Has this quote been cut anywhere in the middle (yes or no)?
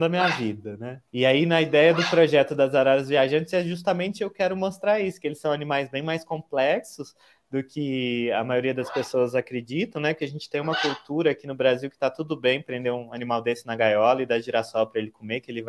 yes